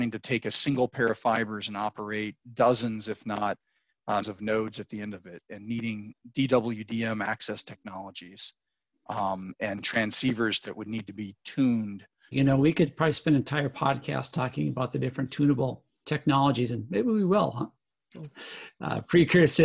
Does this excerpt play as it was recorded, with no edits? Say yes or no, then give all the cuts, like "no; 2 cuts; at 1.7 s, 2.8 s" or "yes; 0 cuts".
no; 2 cuts; at 4.2 s, 12.3 s